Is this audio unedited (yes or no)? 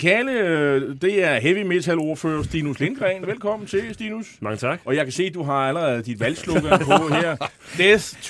yes